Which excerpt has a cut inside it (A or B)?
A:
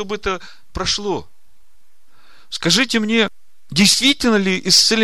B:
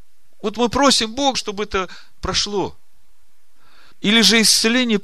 B